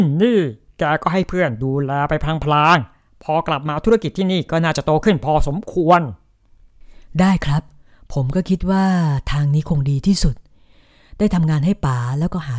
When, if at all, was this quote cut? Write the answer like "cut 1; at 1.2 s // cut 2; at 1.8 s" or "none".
none